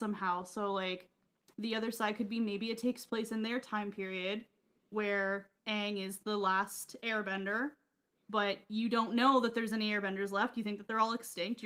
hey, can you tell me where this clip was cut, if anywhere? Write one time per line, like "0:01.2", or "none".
0:05.6